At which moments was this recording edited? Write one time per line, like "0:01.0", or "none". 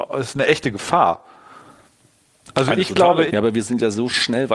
0:03.3